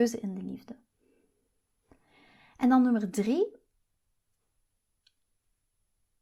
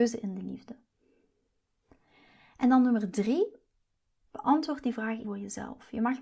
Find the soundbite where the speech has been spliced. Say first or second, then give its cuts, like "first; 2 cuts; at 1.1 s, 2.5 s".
second; 2 cuts; at 4.2 s, 5.2 s